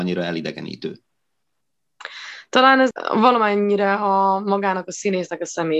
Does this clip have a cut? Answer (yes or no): no